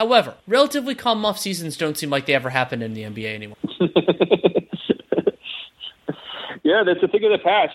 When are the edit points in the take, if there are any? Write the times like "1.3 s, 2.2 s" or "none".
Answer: none